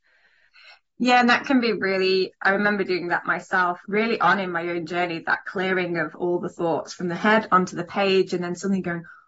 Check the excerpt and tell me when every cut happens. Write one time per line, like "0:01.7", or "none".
0:03.8